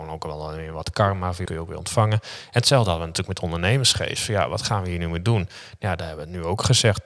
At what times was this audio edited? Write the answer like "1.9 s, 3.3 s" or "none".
1.4 s